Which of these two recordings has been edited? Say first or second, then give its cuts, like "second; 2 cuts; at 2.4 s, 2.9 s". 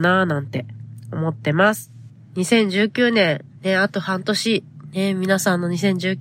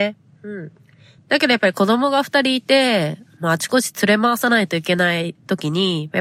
second; 1 cut; at 1.2 s